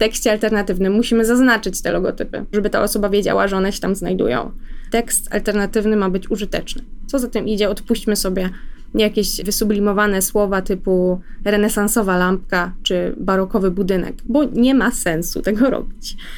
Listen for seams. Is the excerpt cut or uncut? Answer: cut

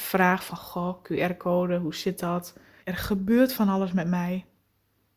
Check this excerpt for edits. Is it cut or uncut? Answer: cut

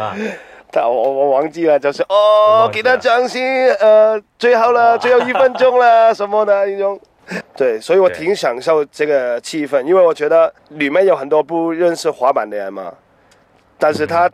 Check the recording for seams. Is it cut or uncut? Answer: cut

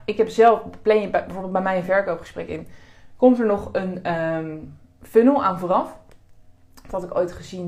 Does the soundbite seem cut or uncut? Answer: uncut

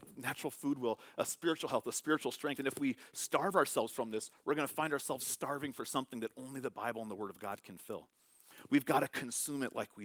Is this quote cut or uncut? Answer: uncut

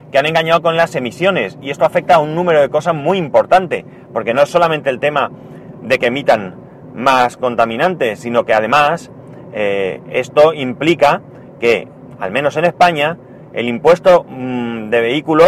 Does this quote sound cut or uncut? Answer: uncut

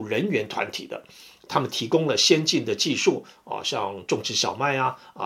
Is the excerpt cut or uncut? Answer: uncut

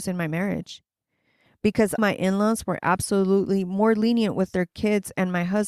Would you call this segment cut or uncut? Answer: cut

